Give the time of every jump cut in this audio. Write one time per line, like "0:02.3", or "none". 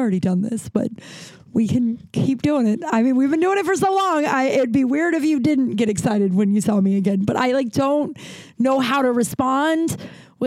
none